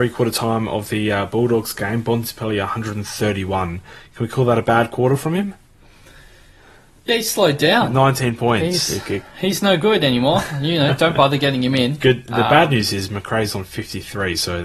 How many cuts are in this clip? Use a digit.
0